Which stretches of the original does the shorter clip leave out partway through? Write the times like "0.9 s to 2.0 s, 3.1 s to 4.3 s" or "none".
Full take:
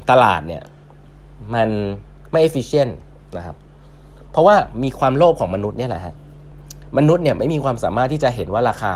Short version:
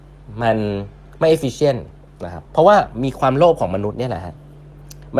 3.6 s to 4.3 s